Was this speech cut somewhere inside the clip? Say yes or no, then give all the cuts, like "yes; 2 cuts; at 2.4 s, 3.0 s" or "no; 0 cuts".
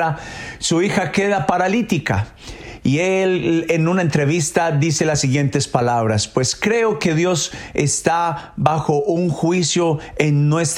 no; 0 cuts